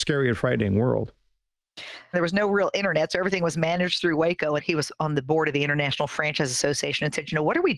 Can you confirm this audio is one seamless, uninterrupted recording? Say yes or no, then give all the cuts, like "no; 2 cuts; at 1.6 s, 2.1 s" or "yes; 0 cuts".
no; 2 cuts; at 2.1 s, 4.6 s